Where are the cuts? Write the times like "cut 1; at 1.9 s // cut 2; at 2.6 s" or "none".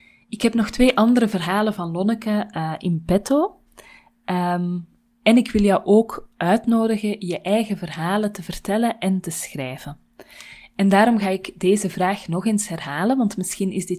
none